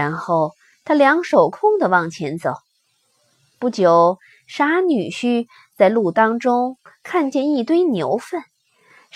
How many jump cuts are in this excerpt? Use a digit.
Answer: 1